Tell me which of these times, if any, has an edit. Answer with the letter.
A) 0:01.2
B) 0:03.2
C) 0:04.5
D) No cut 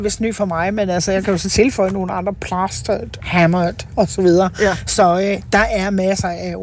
B